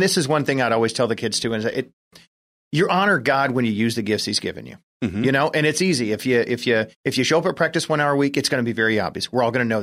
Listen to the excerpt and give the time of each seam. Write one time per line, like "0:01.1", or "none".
none